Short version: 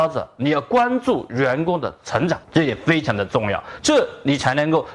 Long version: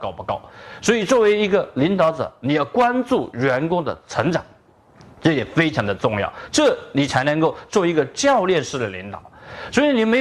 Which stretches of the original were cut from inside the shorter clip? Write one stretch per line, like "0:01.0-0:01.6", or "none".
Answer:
0:04.5-0:05.1